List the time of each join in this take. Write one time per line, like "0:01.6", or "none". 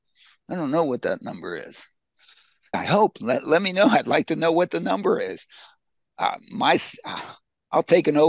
0:02.7